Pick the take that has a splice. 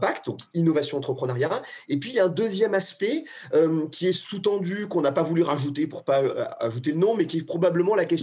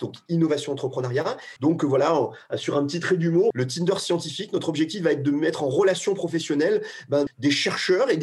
second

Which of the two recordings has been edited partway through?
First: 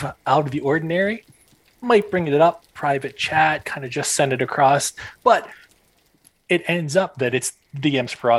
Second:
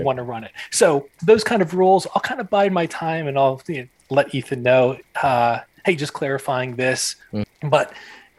second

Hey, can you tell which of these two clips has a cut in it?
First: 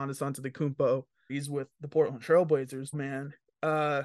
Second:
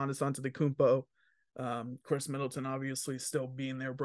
first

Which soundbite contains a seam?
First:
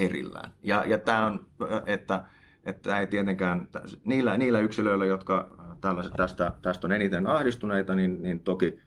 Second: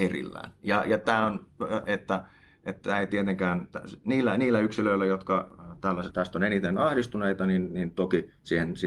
second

